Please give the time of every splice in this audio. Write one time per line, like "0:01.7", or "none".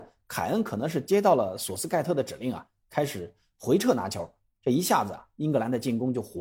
none